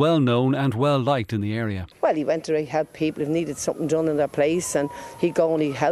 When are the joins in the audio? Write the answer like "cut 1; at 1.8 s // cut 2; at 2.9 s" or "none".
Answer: cut 1; at 1.9 s

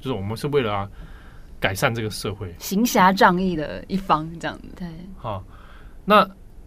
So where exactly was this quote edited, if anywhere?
cut 1; at 4.8 s

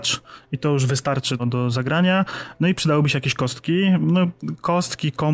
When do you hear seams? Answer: cut 1; at 1.4 s

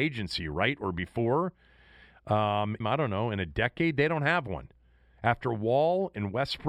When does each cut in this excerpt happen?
cut 1; at 2.8 s

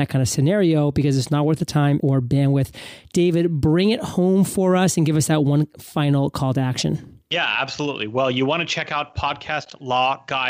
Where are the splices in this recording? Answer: cut 1; at 2.0 s

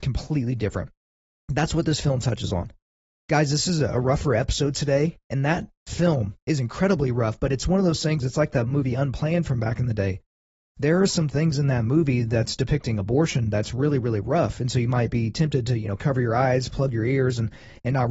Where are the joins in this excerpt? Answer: none

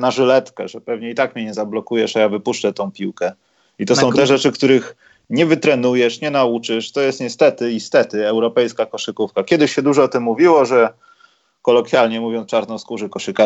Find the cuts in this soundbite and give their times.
none

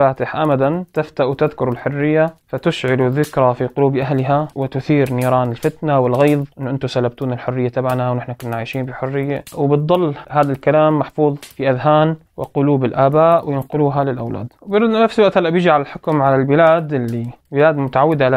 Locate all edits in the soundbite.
cut 1; at 6.5 s

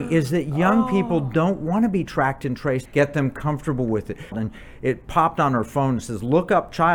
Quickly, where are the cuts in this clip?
cut 1; at 2.9 s // cut 2; at 4.3 s

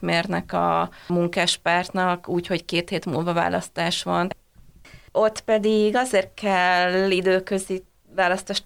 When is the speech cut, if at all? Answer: cut 1; at 5.1 s

